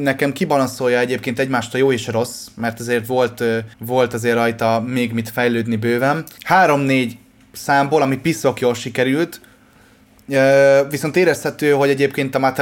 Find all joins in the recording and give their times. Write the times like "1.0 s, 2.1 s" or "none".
3.7 s, 6.4 s